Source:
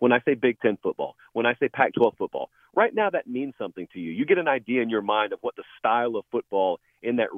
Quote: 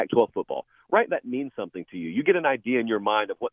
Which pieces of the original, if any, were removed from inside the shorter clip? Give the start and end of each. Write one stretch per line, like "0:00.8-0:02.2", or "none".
0:02.9-0:03.1